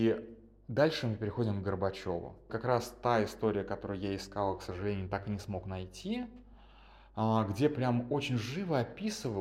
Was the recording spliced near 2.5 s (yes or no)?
yes